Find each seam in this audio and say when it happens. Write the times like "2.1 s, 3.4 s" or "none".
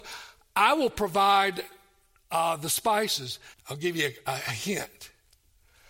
3.5 s